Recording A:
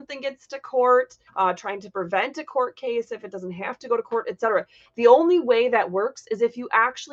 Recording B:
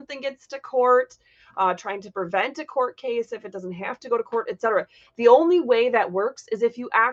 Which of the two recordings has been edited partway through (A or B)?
A